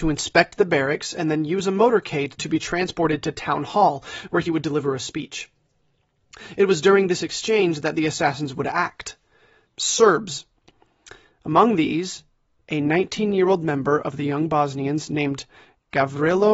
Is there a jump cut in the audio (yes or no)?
yes